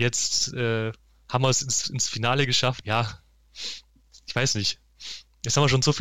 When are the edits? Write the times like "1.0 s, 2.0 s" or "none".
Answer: 2.8 s